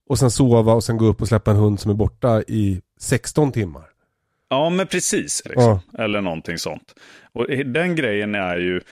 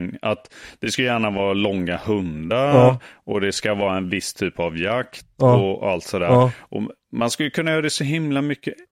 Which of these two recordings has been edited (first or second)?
first